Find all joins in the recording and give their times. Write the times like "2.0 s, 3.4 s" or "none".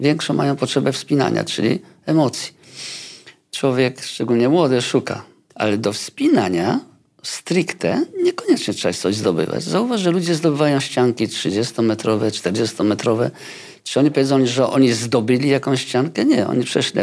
5.5 s